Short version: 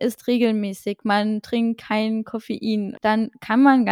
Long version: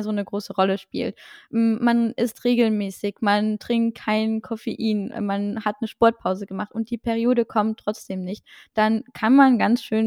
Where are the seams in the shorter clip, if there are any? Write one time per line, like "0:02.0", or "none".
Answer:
0:03.0